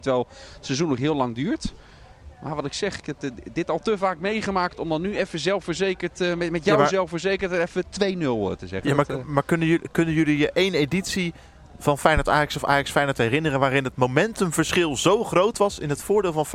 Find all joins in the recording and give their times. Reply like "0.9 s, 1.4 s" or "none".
none